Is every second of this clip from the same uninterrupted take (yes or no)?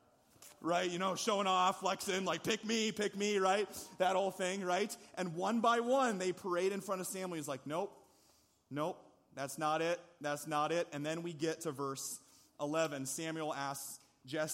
yes